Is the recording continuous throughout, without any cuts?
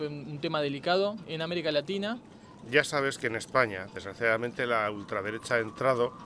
no; 2 cuts; at 1.2 s, 2.6 s

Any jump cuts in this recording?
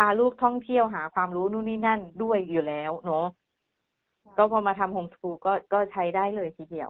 no; 0 cuts

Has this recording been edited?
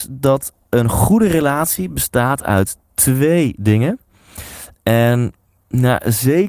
yes; 1 cut; at 4.7 s

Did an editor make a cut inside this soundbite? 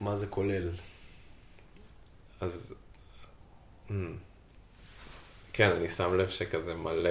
no; 0 cuts

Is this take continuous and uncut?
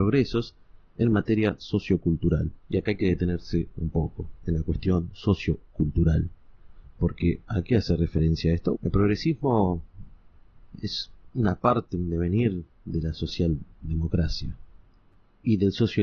no; 2 cuts; at 2.6 s, 8.7 s

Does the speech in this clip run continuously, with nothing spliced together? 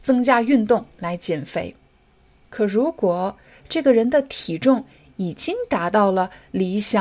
yes; 0 cuts

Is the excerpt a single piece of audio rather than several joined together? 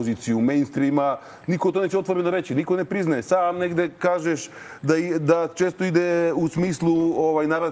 yes; 0 cuts

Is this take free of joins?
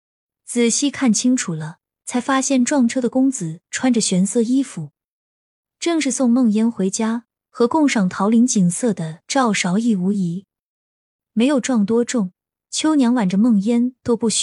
yes; 0 cuts

